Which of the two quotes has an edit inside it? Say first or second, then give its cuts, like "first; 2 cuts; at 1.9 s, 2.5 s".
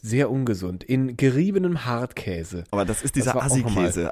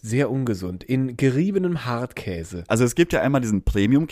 second; 1 cut; at 2.7 s